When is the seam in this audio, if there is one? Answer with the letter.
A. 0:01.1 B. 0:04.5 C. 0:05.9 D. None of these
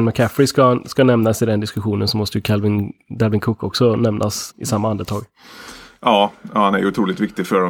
B